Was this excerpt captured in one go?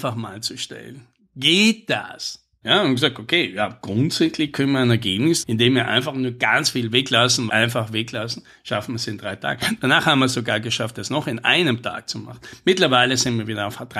no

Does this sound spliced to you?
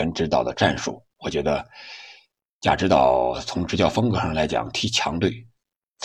no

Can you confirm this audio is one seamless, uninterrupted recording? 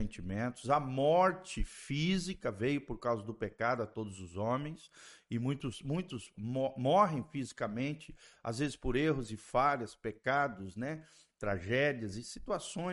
yes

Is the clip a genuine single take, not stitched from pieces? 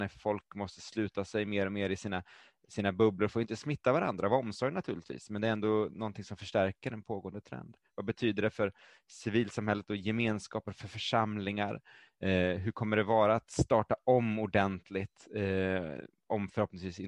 yes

